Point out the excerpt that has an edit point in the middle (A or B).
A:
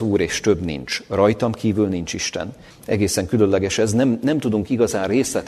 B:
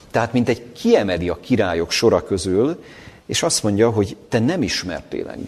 A